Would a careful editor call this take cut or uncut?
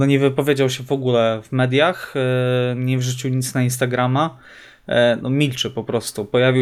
uncut